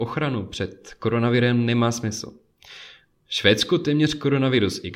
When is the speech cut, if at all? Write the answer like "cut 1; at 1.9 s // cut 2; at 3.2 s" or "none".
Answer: cut 1; at 3.2 s